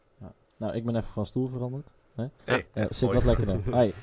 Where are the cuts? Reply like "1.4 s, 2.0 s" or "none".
2.4 s